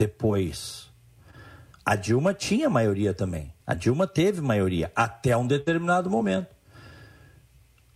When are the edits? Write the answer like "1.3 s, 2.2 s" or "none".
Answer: 1.7 s, 3.6 s